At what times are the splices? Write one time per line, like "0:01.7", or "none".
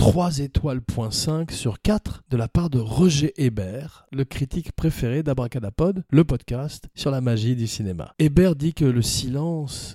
none